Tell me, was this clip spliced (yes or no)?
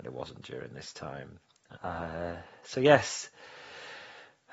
yes